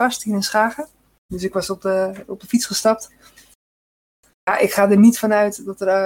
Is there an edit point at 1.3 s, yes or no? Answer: yes